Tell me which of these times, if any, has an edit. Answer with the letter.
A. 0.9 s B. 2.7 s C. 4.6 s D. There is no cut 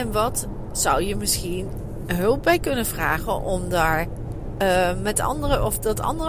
D